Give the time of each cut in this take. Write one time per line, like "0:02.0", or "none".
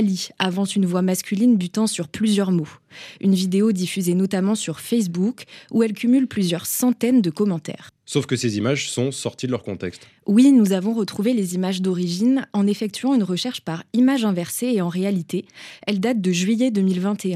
none